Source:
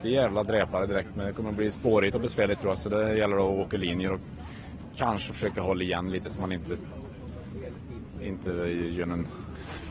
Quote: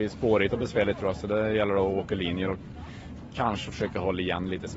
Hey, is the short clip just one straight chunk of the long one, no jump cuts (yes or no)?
yes